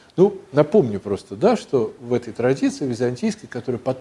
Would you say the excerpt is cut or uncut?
uncut